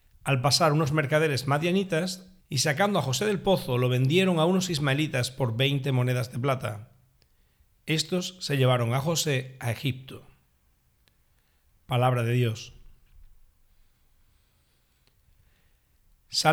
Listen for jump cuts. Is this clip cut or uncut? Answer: cut